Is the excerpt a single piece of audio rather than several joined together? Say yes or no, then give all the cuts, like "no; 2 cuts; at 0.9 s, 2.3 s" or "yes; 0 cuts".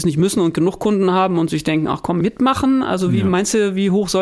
no; 1 cut; at 2.2 s